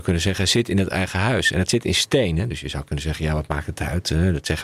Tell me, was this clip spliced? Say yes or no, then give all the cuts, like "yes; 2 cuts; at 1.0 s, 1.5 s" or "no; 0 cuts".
no; 0 cuts